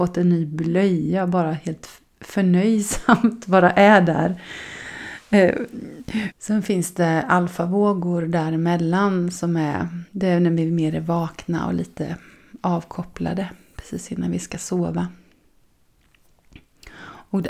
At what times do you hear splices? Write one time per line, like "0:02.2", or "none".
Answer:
0:06.3
0:10.1

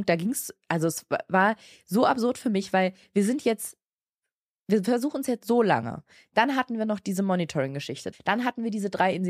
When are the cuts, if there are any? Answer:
0:08.1

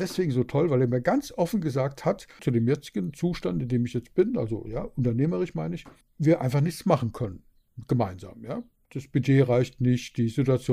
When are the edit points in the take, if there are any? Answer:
0:02.4

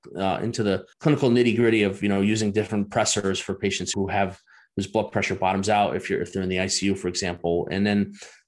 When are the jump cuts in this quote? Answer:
0:00.9
0:03.9

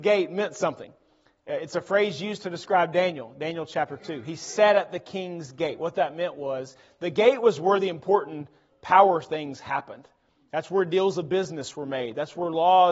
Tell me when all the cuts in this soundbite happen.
none

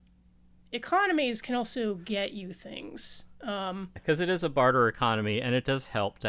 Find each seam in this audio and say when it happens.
0:04.0

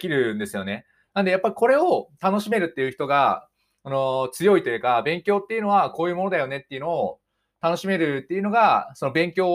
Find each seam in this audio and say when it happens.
none

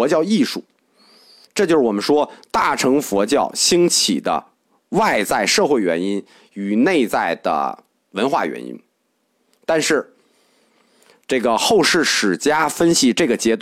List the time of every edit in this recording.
0:01.4

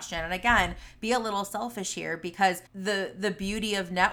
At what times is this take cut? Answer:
0:02.7

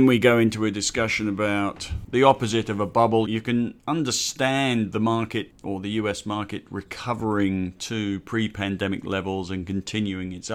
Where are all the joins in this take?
0:03.3

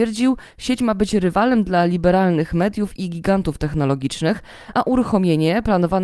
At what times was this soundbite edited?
none

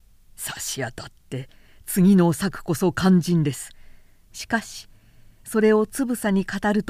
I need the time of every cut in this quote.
0:04.3

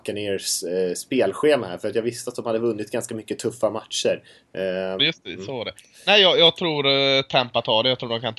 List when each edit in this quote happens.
0:05.0

